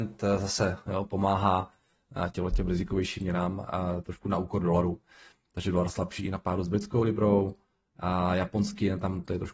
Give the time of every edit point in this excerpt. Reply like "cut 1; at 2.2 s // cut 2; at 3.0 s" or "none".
none